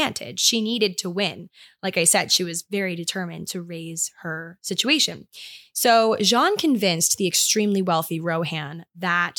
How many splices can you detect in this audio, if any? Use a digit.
0